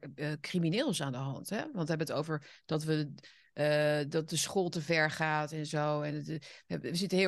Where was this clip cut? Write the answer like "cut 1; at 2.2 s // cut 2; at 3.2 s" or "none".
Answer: none

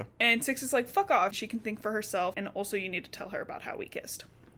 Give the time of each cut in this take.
cut 1; at 1.3 s // cut 2; at 2.3 s

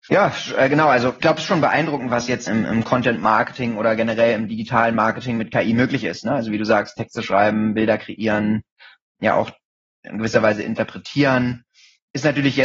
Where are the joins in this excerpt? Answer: cut 1; at 2.5 s

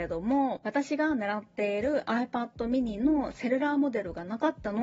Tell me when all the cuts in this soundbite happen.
none

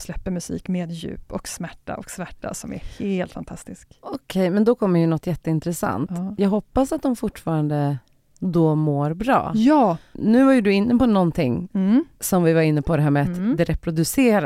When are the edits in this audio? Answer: cut 1; at 10.1 s

